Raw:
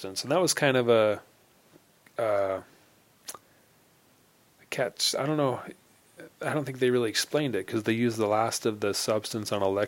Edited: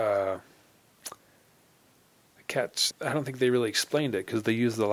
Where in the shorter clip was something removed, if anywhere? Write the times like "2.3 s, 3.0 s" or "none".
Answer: 2.9 s

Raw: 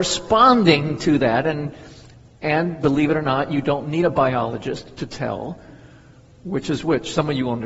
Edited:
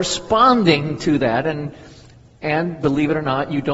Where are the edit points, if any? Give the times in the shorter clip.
none

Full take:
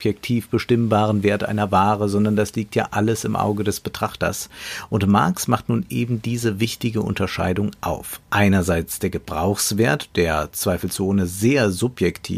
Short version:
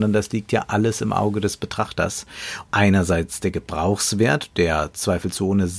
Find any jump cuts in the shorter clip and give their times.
2.6 s

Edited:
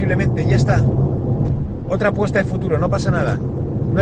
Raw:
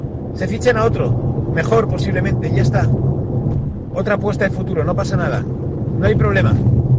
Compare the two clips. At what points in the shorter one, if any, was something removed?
none

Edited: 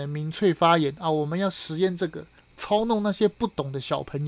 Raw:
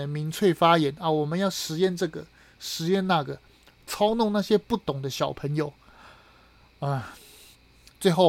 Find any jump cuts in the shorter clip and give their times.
2.4 s

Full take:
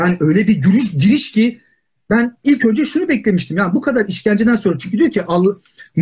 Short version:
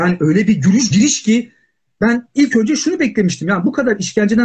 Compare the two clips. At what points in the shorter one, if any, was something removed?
0.9 s

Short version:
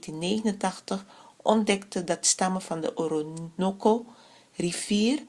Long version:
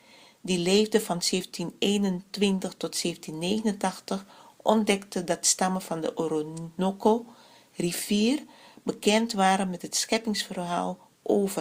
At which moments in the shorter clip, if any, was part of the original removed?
none

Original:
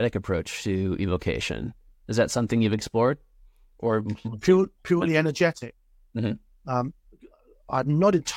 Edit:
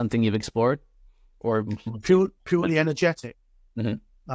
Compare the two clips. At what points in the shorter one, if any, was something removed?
none

